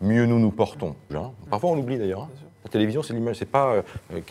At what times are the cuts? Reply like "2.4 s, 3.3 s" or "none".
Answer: 1.1 s